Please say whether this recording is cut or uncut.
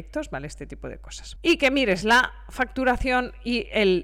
uncut